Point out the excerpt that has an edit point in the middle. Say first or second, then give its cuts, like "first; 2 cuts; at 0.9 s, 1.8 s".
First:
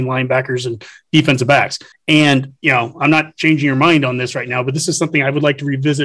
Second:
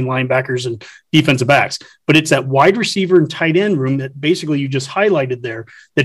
first; 1 cut; at 1.9 s